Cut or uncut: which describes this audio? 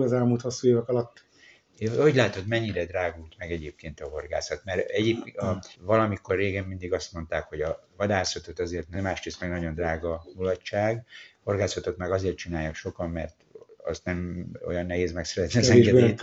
cut